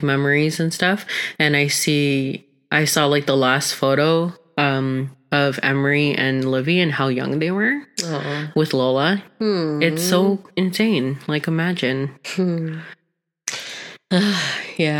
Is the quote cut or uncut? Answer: uncut